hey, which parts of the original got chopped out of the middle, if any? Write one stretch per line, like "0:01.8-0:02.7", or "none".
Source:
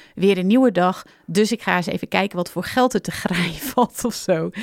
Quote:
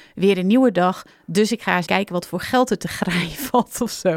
0:01.9-0:02.1